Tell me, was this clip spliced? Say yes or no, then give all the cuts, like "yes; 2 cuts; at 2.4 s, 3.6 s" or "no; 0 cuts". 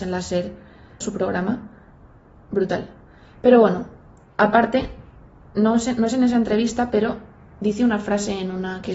yes; 1 cut; at 1.0 s